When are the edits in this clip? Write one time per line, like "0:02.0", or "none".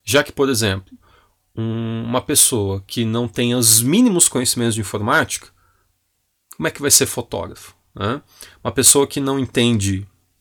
none